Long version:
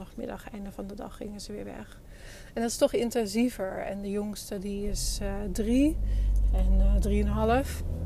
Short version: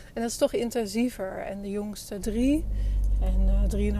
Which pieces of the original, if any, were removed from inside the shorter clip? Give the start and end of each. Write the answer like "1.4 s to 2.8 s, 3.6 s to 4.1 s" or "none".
4.6 s to 5.5 s